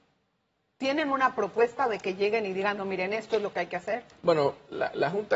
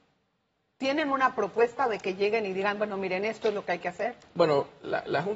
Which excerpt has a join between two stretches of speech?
first; 1 cut; at 2.8 s

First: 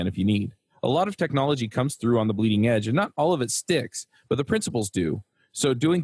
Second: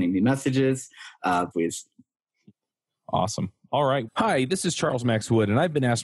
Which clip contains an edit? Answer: second; 2 cuts; at 1.5 s, 4.1 s

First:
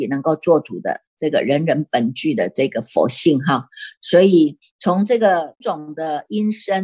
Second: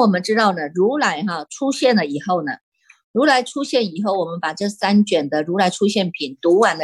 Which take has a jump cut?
first; 1 cut; at 5.6 s

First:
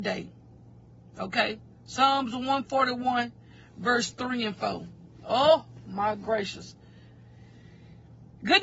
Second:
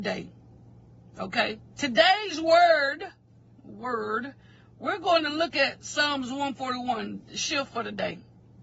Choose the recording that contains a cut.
second; 1 cut; at 1.7 s

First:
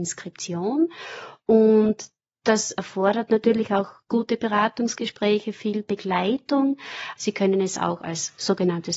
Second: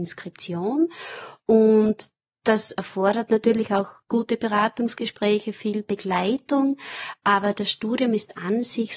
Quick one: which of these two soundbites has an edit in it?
first; 1 cut; at 7.2 s

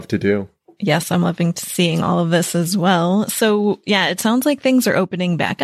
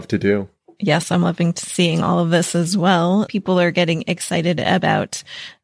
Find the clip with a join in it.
second; 1 cut; at 3.3 s

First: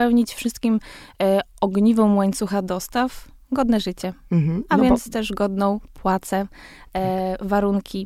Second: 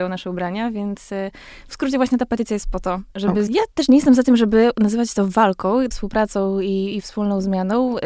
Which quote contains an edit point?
second; 2 cuts; at 3.5 s, 5.9 s

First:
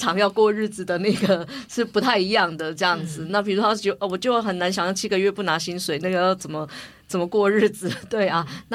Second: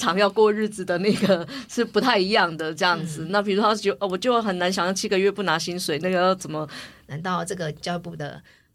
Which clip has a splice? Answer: second; 1 cut; at 7.0 s

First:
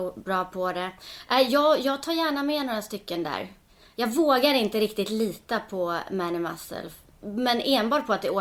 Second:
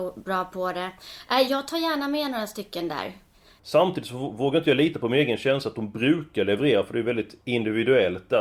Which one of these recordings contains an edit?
second; 2 cuts; at 1.5 s, 3.6 s

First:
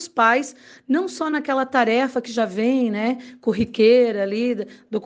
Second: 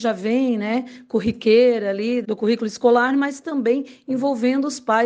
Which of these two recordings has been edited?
second; 1 cut; at 2.2 s

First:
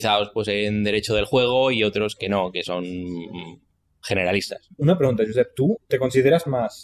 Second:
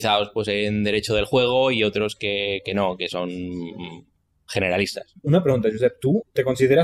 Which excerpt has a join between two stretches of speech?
first; 1 cut; at 2.2 s

